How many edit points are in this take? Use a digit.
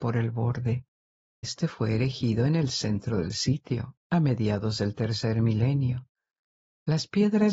1